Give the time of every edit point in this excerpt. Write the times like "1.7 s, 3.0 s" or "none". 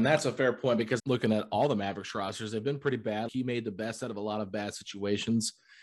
1.0 s, 3.3 s